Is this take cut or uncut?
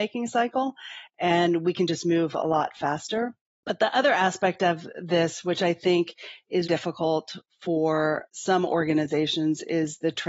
cut